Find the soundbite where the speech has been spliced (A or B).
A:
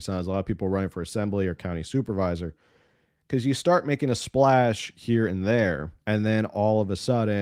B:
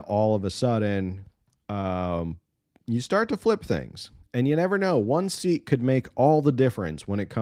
A